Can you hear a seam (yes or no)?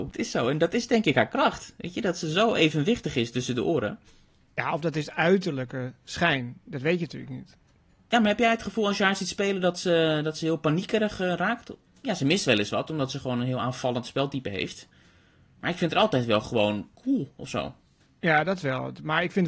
no